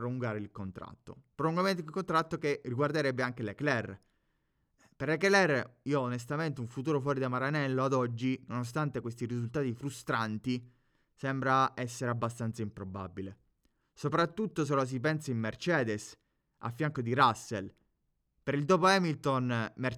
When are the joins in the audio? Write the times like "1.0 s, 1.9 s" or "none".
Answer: none